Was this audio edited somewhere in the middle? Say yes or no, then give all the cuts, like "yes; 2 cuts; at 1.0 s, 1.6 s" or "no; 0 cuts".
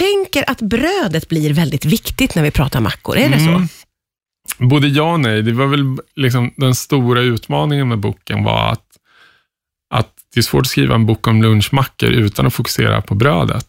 no; 0 cuts